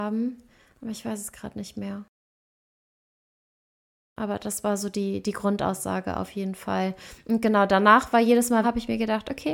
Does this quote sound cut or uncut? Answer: cut